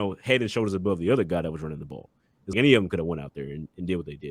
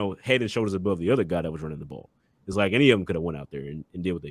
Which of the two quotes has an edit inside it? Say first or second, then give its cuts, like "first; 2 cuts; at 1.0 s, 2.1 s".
first; 1 cut; at 2.5 s